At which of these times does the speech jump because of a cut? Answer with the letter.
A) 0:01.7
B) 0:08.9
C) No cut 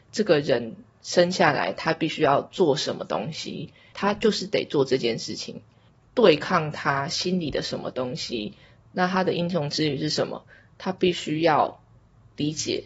B